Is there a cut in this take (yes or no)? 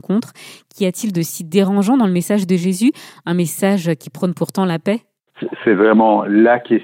no